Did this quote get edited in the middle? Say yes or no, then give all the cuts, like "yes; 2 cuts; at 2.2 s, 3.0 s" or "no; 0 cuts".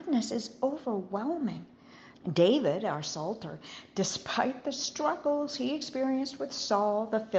yes; 1 cut; at 2.1 s